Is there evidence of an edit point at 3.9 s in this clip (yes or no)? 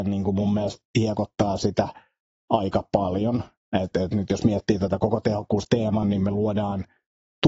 yes